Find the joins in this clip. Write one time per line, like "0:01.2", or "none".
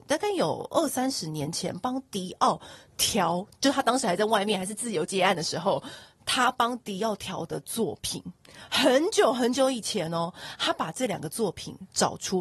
none